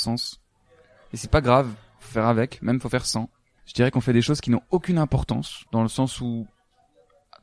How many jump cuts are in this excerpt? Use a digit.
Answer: 2